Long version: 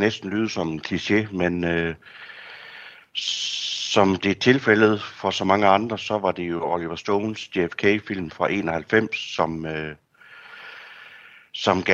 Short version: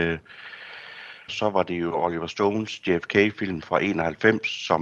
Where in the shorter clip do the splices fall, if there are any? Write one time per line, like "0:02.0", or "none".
0:01.3